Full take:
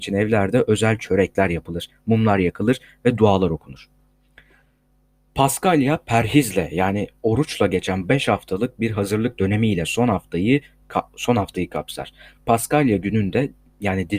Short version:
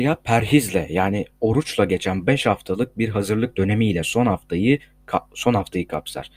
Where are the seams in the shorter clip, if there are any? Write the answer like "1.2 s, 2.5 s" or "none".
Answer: none

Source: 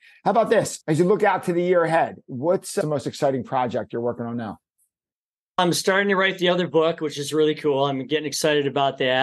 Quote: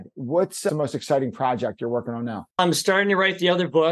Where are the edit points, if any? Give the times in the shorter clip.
2.5 s

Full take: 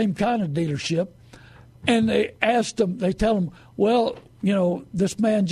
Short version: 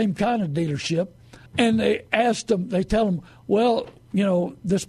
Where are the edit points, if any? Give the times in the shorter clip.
1.5 s

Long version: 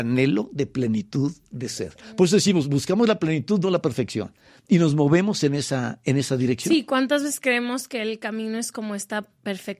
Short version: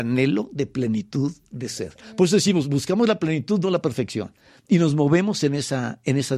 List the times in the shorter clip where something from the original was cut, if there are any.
none

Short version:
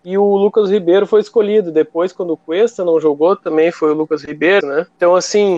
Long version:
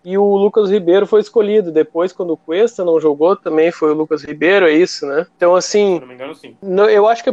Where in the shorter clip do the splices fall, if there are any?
4.6 s

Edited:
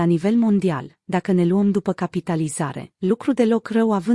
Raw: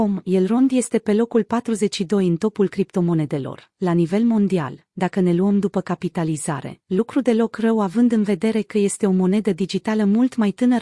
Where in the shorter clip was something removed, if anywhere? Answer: none

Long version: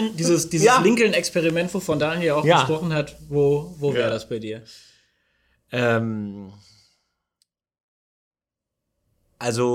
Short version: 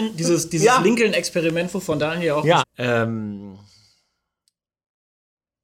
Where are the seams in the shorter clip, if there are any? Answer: 2.6 s

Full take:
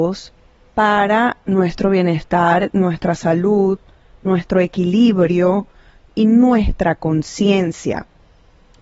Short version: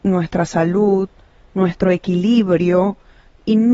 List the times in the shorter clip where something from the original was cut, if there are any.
none

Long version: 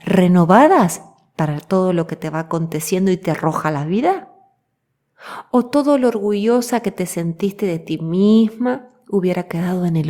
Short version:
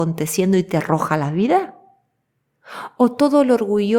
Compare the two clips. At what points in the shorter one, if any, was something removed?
none

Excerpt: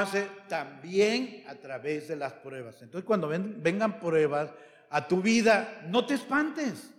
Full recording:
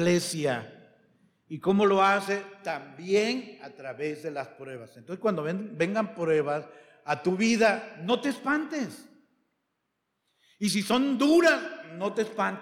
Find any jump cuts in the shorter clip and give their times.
none

